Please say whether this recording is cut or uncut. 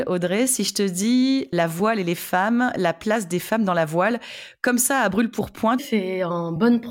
cut